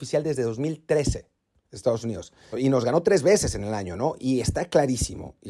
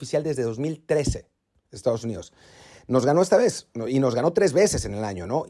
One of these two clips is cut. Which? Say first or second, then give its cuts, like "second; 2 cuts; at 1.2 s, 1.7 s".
first; 1 cut; at 2.5 s